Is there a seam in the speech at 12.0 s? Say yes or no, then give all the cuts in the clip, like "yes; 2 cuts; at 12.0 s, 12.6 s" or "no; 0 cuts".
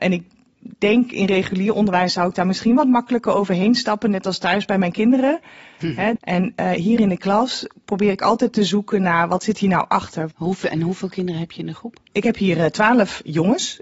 no; 2 cuts; at 6.2 s, 10.3 s